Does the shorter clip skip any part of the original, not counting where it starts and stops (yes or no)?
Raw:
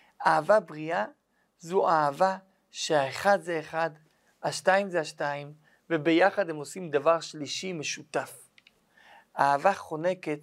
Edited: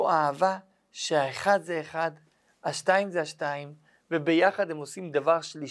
no